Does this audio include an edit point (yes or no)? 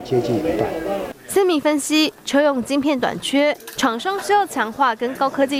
yes